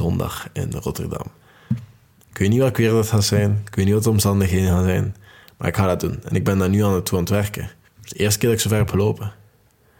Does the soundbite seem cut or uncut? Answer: uncut